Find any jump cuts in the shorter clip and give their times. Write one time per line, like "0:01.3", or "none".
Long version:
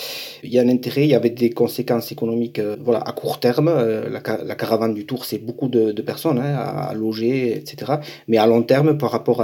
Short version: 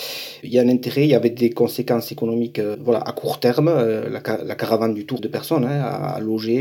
0:05.2